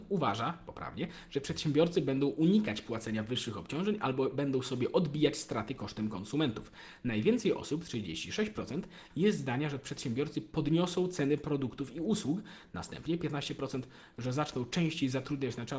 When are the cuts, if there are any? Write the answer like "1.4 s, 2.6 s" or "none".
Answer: none